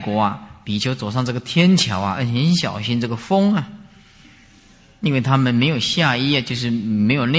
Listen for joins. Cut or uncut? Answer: uncut